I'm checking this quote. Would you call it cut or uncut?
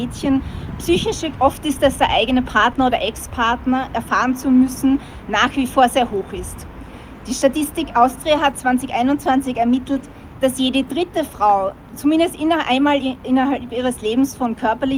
cut